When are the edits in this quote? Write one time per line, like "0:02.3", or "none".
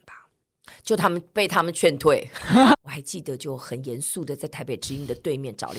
0:02.7